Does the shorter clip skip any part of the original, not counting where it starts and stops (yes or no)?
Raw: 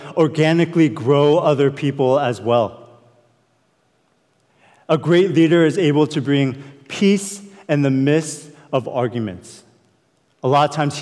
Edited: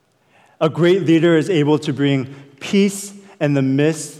no